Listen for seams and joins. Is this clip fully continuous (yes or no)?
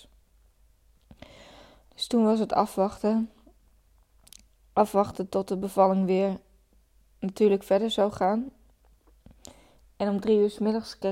yes